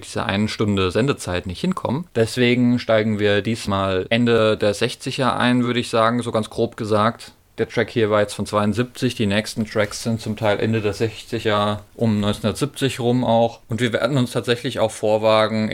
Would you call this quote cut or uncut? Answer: uncut